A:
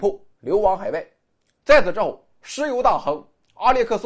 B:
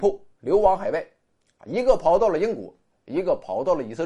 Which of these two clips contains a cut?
A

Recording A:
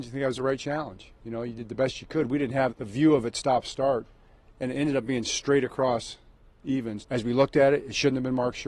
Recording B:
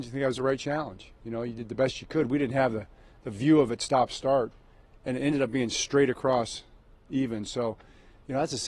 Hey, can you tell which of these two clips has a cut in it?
A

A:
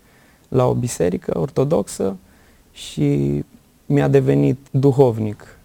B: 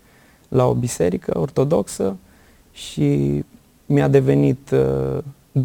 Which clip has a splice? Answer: A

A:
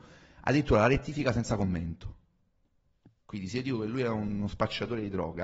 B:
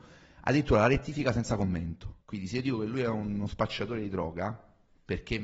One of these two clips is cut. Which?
B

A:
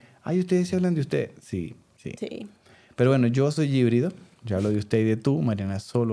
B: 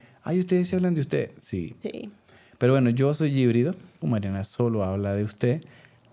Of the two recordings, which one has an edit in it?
B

